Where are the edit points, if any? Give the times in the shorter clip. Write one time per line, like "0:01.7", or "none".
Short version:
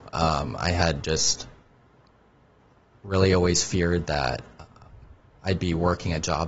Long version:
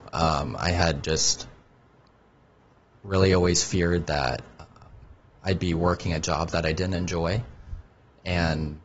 none